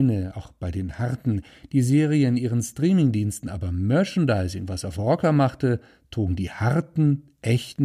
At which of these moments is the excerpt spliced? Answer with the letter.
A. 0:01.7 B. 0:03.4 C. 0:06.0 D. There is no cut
D